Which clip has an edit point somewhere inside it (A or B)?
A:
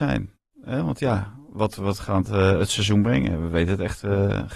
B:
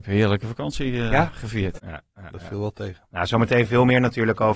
B